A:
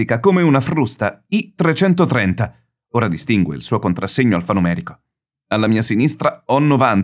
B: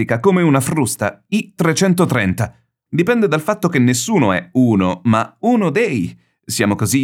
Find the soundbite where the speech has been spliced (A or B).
B